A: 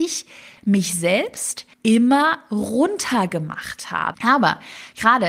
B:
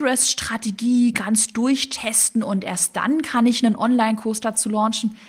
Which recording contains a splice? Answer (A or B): A